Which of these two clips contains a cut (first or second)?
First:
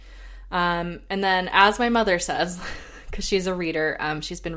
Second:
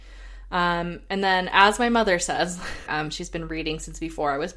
second